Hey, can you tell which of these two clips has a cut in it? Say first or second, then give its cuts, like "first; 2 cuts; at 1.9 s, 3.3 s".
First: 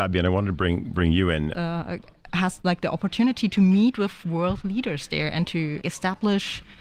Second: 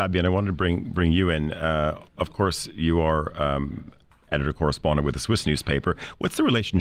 first; 2 cuts; at 1.5 s, 5.8 s